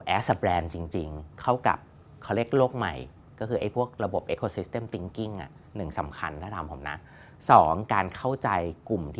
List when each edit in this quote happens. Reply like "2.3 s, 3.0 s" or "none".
none